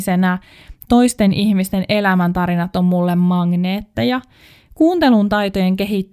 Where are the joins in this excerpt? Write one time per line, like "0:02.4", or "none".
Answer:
none